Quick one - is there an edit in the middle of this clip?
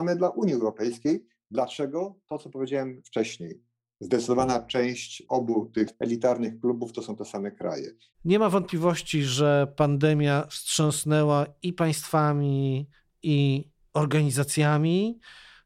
yes; 1 cut; at 8.1 s

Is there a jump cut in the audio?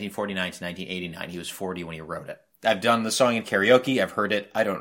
yes; 1 cut; at 2.5 s

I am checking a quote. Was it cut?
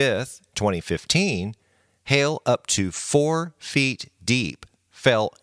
no; 0 cuts

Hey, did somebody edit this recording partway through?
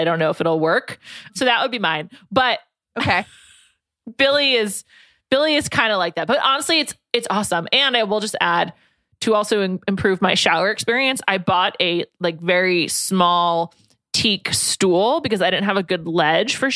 no; 0 cuts

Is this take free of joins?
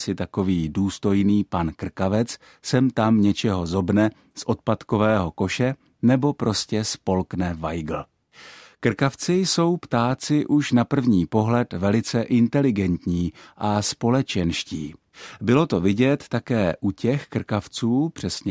yes; 0 cuts

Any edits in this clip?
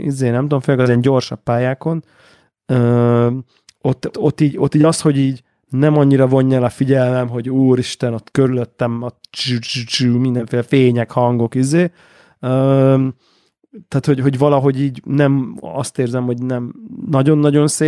yes; 1 cut; at 4.1 s

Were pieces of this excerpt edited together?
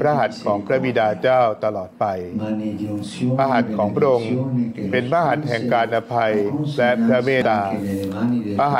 yes; 1 cut; at 7.4 s

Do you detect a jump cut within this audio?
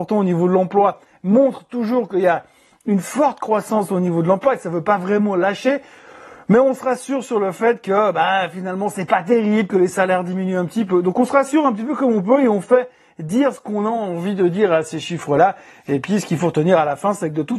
no; 0 cuts

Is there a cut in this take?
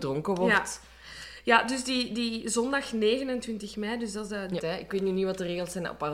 yes; 1 cut; at 4.6 s

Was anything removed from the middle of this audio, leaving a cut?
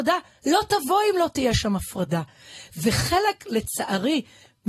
no; 0 cuts

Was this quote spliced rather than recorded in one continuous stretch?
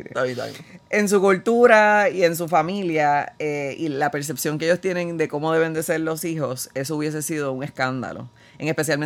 no; 0 cuts

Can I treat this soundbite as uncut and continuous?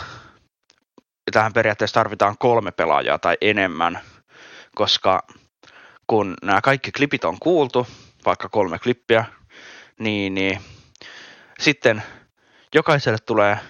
yes; 0 cuts

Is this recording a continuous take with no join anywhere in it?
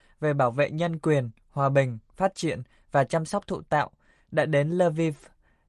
yes; 0 cuts

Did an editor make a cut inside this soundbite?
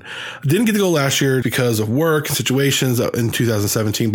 yes; 1 cut; at 1.4 s

